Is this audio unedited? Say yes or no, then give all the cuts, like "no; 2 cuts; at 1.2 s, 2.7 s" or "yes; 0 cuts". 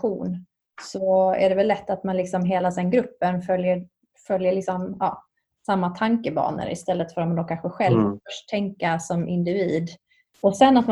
yes; 0 cuts